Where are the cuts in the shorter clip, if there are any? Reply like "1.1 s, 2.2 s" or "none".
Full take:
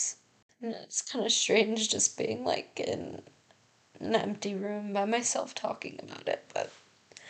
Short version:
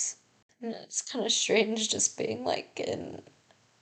none